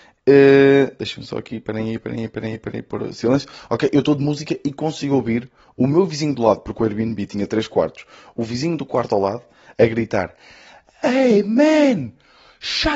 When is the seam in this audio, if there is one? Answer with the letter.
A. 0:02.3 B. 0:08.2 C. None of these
C